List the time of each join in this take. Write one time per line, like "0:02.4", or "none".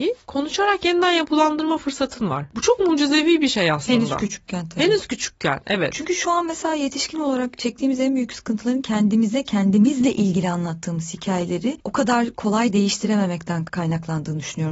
none